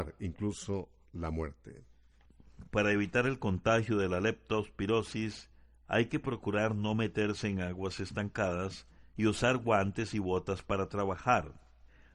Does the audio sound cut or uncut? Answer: uncut